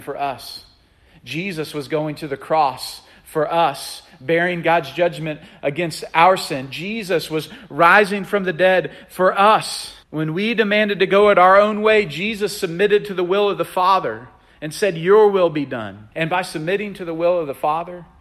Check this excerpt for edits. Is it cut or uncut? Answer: cut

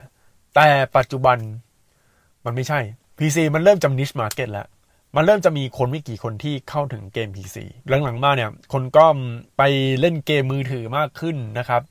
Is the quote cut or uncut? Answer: cut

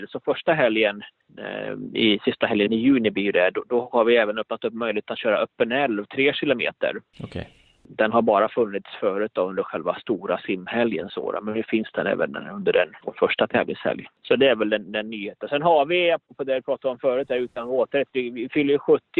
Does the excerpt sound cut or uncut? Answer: uncut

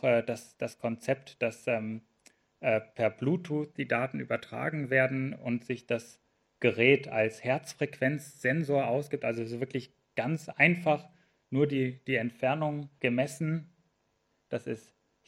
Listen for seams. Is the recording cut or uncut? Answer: cut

